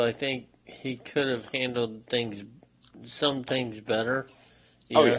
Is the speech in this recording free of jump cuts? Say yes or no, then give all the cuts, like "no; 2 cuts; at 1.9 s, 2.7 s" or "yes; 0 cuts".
yes; 0 cuts